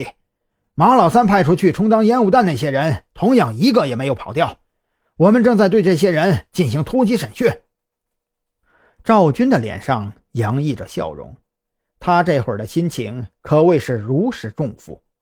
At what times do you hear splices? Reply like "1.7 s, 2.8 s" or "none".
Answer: none